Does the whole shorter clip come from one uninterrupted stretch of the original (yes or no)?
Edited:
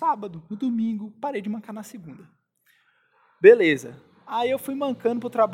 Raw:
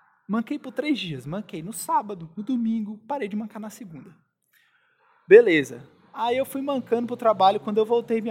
yes